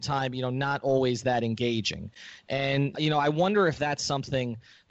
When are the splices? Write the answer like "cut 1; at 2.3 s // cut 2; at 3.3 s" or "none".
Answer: cut 1; at 2.9 s